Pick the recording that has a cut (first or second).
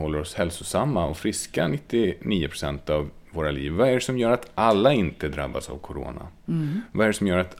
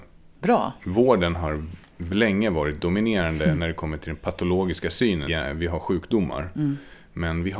second